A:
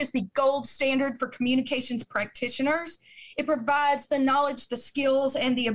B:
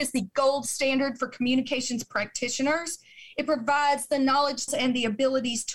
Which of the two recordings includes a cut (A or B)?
B